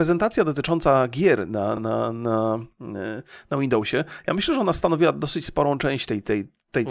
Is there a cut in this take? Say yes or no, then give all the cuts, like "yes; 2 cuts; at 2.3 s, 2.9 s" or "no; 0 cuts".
no; 0 cuts